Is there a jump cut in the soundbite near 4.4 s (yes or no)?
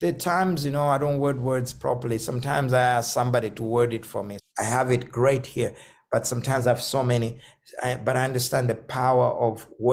yes